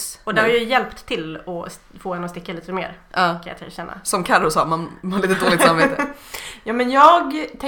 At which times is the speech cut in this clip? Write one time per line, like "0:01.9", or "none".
none